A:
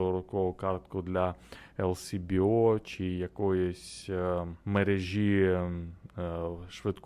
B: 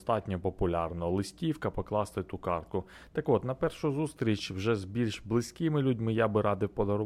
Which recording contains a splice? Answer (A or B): A